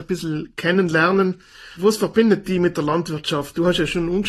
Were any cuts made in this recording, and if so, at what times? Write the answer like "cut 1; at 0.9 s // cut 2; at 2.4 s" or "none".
none